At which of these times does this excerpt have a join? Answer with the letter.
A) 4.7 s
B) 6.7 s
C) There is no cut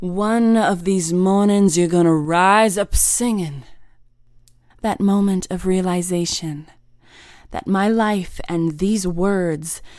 A